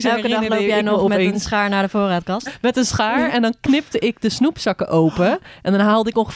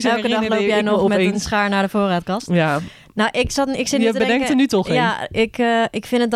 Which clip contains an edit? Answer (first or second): first